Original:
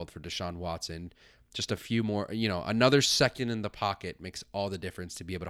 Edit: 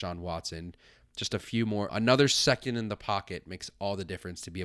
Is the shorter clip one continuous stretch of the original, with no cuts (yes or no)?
no